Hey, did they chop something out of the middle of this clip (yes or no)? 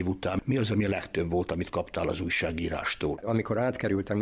yes